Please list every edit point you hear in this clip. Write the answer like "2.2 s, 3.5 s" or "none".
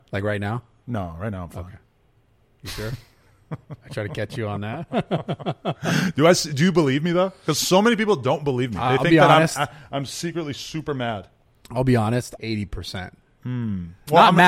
12.4 s